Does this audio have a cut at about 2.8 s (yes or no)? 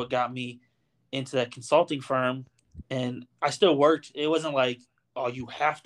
yes